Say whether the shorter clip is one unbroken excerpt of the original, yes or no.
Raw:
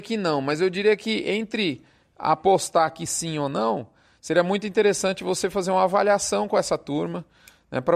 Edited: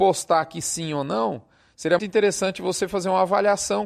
no